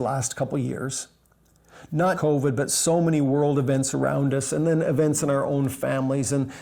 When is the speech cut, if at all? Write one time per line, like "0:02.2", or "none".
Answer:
0:02.1